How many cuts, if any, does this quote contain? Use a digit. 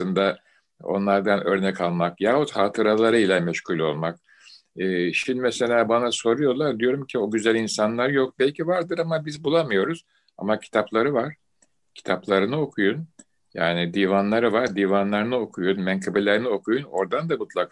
0